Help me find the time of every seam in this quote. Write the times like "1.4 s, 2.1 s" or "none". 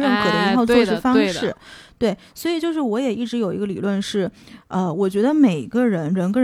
none